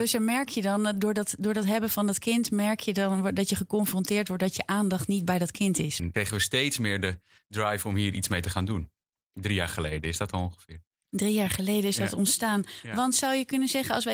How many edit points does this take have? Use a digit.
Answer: 1